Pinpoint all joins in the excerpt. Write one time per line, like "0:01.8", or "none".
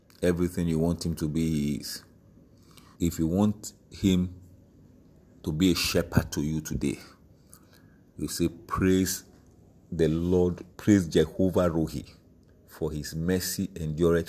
0:02.9
0:10.7